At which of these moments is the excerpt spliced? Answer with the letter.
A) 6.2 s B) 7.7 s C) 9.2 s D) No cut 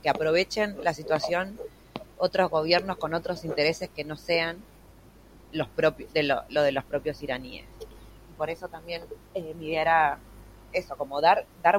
C